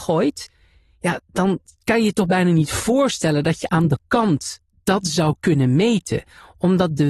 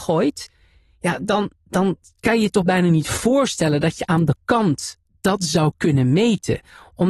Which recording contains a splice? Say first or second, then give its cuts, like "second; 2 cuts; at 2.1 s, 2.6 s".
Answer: first; 1 cut; at 1.2 s